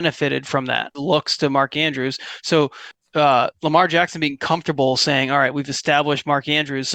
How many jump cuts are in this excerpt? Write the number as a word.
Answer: one